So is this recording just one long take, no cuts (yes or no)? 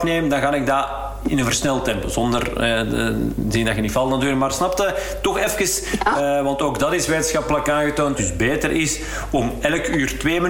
no